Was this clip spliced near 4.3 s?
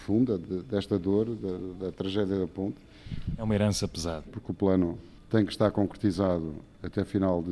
yes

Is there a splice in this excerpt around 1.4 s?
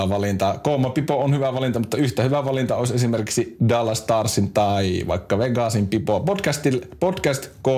no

